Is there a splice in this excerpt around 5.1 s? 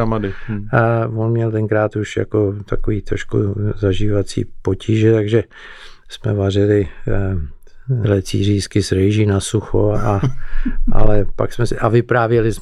no; 2 cuts; at 8.0 s, 9.9 s

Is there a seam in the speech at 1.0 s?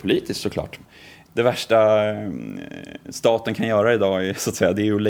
no; 0 cuts

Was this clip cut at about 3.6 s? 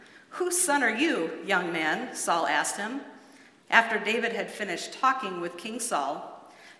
yes; 1 cut; at 3.6 s

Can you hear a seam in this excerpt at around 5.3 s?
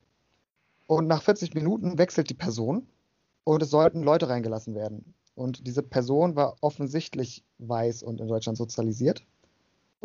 no; 1 cut; at 3.4 s

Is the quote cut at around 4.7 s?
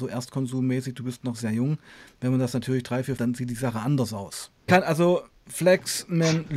yes; 2 cuts; at 3.2 s, 4.7 s

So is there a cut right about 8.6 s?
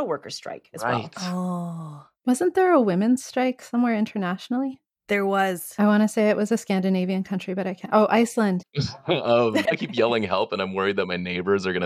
yes; 2 cuts; at 8.6 s, 9.6 s

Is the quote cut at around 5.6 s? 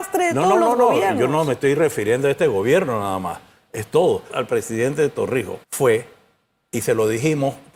yes; 2 cuts; at 4.3 s, 5.6 s

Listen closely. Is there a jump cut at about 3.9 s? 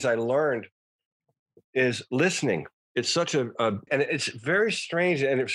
yes; 1 cut; at 3.9 s

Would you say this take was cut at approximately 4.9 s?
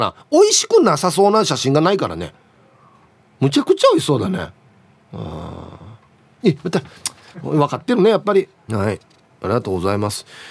no; 2 cuts; at 7.3 s, 8.7 s

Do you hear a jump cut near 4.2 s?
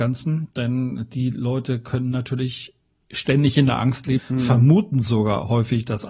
yes; 1 cut; at 4.2 s

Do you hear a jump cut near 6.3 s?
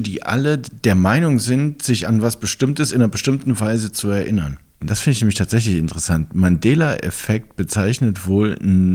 no; 1 cut; at 4.8 s

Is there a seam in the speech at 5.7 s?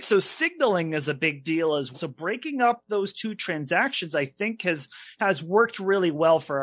no; 1 cut; at 1.9 s

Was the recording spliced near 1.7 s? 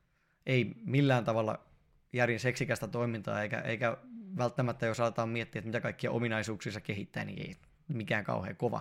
no; 0 cuts

